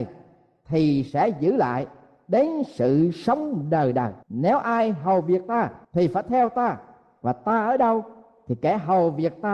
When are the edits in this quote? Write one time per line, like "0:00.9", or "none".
0:04.2
0:05.8